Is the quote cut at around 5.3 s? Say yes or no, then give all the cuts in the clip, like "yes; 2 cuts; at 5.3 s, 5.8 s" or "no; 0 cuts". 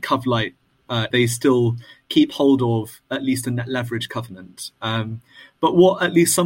no; 1 cut; at 1.1 s